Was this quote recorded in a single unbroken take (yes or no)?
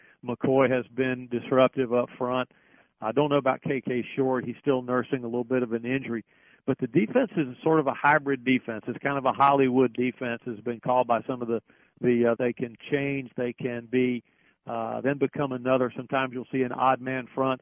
no